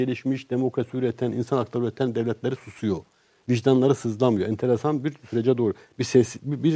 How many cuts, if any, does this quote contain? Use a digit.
0